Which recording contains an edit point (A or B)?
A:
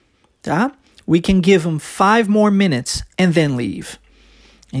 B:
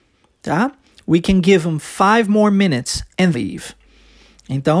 B